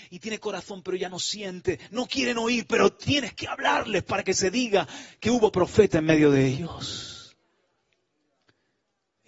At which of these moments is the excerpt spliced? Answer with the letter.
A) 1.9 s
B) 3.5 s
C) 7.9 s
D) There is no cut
D